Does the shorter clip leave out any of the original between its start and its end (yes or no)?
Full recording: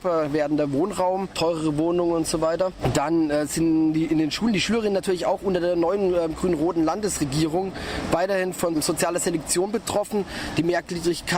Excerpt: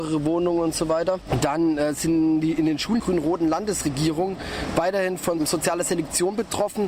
yes